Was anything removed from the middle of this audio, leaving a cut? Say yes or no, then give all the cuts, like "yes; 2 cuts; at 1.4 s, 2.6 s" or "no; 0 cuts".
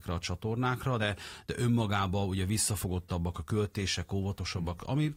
no; 0 cuts